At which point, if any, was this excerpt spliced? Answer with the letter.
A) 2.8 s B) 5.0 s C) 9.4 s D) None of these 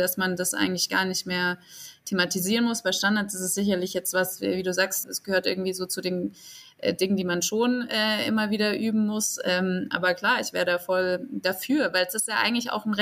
B